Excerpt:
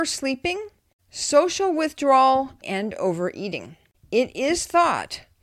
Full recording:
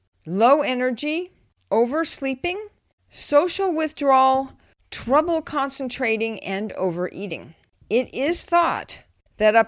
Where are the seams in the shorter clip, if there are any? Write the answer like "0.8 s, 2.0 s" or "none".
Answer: 2.6 s

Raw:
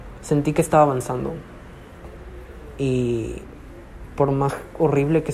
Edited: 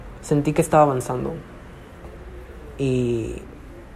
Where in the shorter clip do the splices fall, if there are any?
none

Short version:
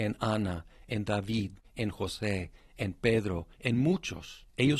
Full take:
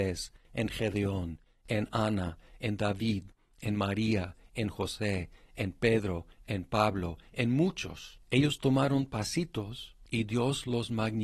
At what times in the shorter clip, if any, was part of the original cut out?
1.6 s, 3.6 s

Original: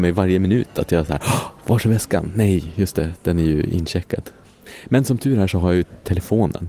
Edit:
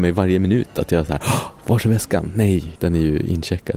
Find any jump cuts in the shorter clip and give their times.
2.7 s

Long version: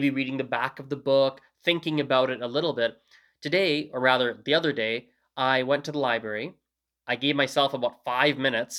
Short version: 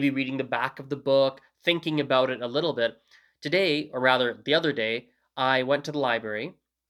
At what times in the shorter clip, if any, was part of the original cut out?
none

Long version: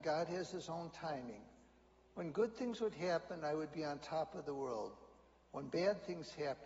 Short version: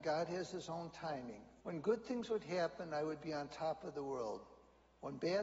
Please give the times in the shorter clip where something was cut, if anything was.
1.6 s

